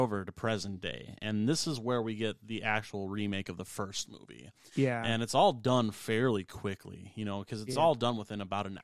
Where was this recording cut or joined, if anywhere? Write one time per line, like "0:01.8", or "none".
none